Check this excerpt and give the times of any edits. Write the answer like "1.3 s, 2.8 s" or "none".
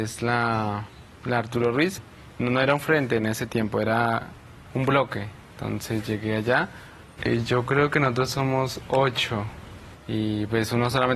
7.2 s, 9.9 s